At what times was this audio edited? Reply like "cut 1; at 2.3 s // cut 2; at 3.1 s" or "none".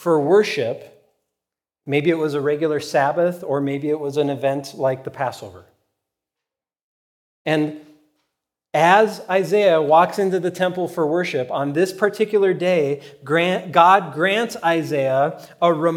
none